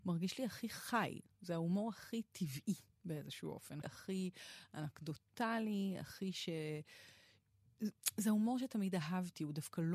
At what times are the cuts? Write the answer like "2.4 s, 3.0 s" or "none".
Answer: 3.8 s